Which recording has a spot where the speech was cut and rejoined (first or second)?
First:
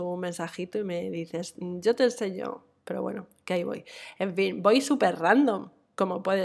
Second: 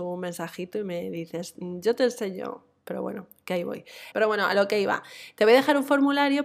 second